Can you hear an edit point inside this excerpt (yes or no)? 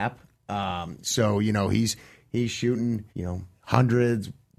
yes